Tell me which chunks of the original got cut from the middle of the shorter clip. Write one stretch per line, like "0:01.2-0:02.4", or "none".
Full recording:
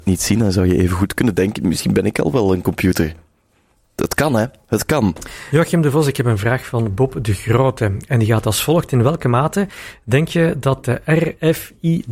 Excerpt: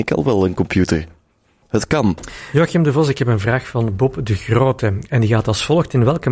0:03.7-0:04.6

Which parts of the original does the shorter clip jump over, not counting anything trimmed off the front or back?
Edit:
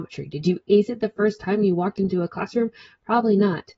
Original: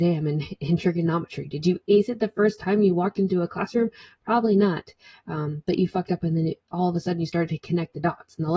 none

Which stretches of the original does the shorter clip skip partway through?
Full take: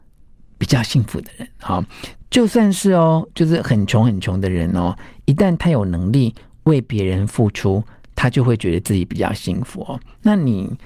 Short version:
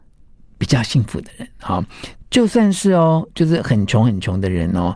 none

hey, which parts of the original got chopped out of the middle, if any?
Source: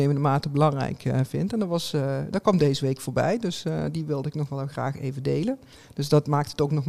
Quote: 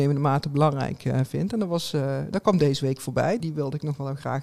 0:03.4-0:03.9

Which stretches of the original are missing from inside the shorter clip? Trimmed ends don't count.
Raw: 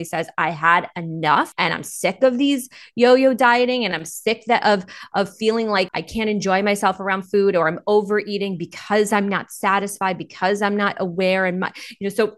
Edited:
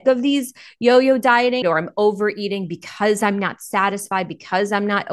0:03.8-0:07.5

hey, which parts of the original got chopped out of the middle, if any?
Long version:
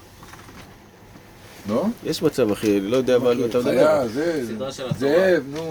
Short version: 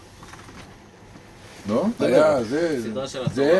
0:02.0-0:03.6

